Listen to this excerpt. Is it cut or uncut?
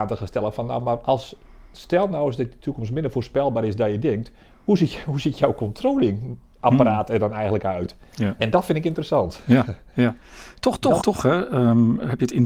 cut